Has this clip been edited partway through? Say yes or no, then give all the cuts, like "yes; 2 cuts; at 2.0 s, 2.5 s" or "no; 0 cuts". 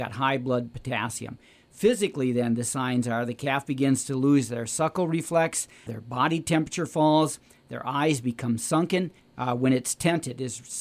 yes; 2 cuts; at 5.9 s, 9.2 s